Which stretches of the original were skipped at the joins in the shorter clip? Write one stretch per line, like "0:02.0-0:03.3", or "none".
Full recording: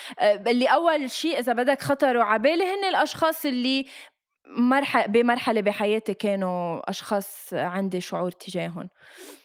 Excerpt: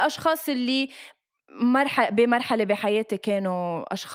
none